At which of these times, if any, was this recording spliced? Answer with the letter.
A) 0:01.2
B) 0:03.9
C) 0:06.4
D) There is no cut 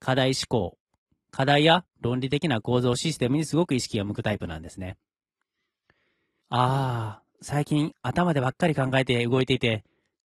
C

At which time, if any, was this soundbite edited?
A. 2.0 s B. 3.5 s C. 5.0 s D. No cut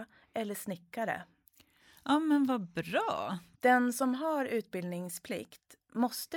B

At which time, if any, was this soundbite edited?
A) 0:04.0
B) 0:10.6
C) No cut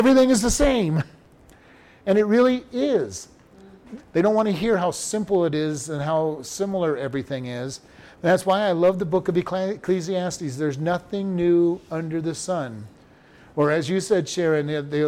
A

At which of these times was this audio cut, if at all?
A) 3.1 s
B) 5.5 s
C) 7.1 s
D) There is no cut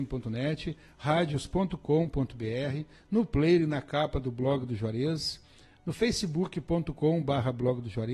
D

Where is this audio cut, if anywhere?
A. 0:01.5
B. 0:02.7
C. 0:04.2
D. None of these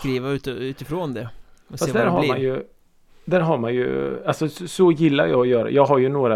D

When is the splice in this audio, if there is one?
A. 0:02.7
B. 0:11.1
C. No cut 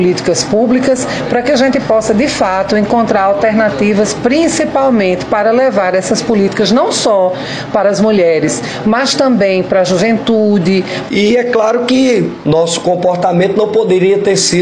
B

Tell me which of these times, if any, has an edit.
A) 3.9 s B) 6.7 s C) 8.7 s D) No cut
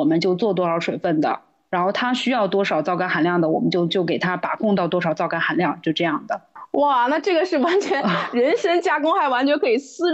A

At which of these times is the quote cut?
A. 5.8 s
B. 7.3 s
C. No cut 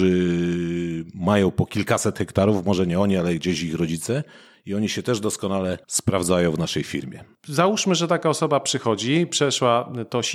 A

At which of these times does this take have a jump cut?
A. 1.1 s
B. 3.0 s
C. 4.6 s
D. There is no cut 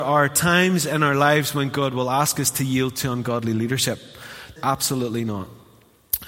C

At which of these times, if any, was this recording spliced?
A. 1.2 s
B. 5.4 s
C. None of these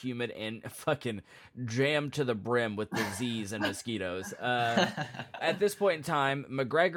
B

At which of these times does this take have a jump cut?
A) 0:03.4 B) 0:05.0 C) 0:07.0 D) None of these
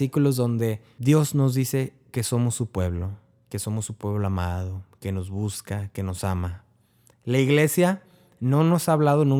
D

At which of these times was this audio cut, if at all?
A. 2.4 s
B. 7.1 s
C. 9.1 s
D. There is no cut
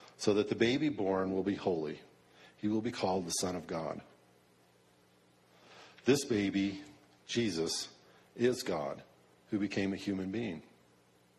D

